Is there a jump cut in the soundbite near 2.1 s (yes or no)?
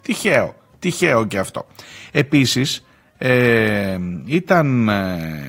yes